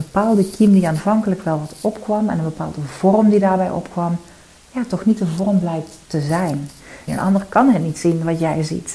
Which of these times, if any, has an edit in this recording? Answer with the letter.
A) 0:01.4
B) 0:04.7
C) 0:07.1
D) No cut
C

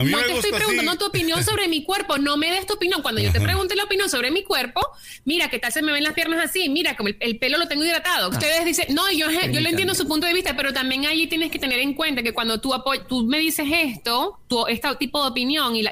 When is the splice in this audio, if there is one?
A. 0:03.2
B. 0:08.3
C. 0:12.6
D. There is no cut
B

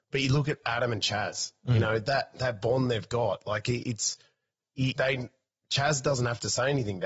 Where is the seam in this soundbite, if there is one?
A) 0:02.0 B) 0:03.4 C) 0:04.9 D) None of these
C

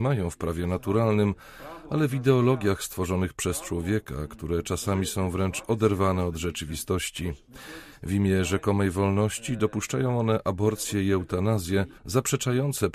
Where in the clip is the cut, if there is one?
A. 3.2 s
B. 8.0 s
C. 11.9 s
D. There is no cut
C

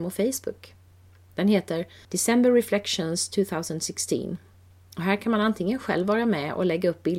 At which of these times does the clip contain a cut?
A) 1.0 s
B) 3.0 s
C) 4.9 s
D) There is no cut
D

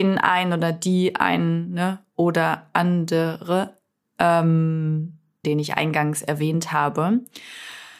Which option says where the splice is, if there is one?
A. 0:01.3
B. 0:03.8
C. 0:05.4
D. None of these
C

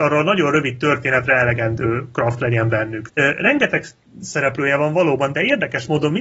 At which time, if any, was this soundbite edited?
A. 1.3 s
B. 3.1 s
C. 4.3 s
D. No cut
B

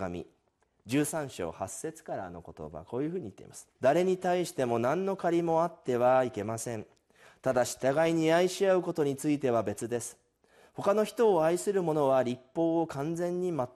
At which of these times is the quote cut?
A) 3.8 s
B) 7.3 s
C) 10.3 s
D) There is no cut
A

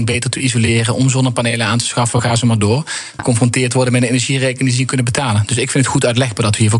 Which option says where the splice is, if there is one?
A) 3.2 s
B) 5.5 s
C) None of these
A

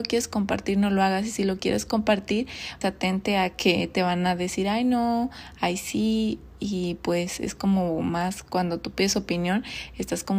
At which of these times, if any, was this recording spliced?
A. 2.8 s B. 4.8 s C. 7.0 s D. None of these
A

